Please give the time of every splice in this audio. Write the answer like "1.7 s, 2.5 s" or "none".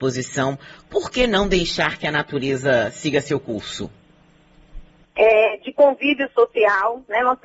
5.0 s